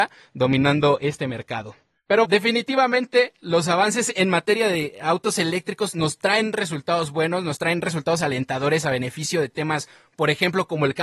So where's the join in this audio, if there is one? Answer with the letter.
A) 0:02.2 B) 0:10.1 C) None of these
A